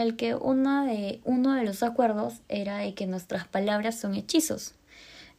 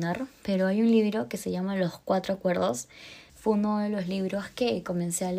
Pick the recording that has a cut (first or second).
second